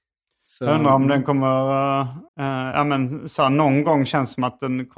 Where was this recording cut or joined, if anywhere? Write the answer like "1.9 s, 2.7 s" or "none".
2.3 s